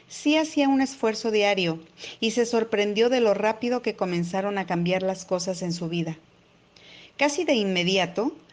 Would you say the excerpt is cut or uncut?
uncut